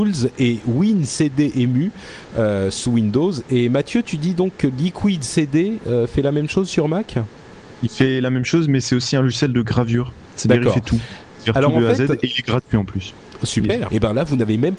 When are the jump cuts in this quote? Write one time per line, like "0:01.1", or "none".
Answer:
0:13.9

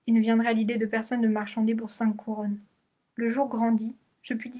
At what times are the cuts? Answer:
0:03.1

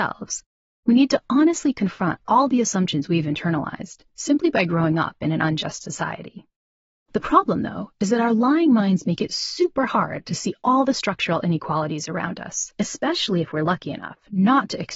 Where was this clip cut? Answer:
0:12.8

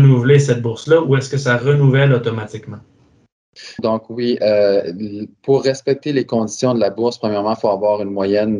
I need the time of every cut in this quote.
0:03.8

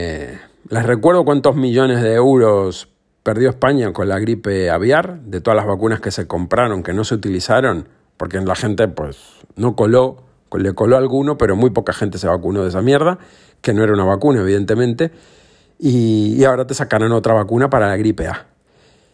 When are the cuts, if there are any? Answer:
none

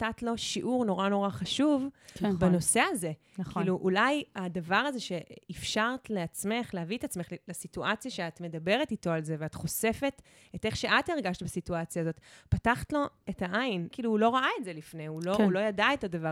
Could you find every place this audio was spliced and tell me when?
0:13.9

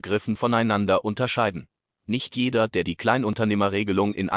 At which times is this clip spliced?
none

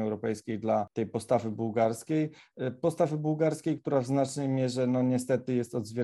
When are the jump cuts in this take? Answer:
none

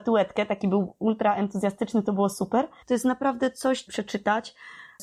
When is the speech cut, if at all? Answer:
0:02.8
0:03.9

